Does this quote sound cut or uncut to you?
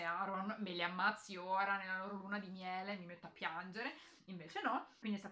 uncut